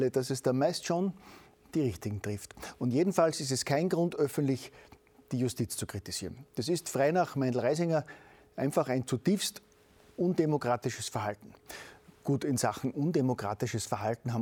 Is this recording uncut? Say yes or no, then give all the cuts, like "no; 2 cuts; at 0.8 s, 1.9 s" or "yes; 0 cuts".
yes; 0 cuts